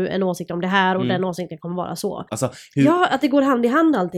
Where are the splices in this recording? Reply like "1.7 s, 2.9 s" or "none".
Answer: 2.3 s